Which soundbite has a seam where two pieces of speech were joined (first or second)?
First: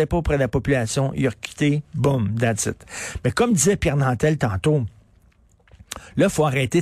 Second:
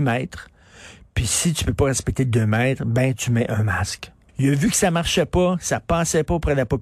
second